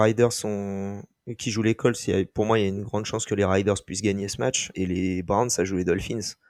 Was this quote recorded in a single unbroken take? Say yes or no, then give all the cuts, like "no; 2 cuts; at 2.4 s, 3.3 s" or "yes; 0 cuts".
no; 1 cut; at 4.7 s